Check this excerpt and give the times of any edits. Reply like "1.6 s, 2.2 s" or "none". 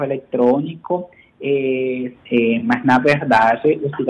2.1 s